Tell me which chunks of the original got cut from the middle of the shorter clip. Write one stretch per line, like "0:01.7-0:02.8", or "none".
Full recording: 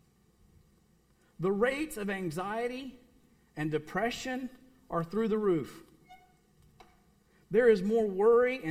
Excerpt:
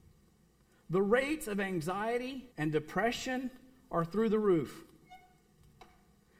0:03.0-0:03.5